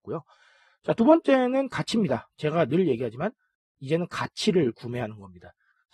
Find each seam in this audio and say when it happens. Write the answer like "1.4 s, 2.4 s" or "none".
none